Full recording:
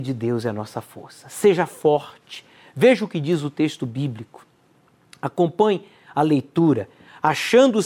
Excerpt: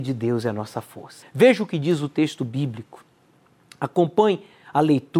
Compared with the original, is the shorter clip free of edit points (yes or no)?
no